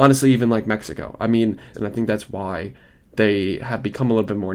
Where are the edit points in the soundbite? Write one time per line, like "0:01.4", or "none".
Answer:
0:01.7